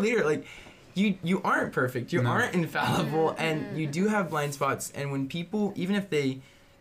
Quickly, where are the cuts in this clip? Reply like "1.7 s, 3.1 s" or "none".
none